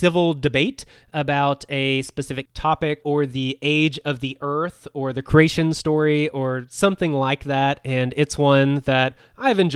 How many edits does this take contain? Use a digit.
1